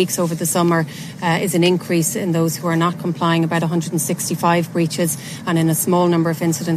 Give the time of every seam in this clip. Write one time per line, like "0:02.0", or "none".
none